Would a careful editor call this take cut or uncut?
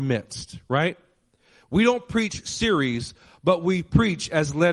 uncut